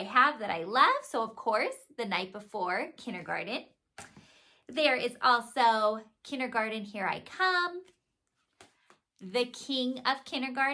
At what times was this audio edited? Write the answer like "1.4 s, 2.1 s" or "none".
none